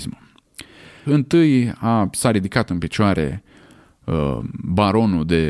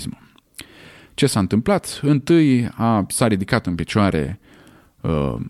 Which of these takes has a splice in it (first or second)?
first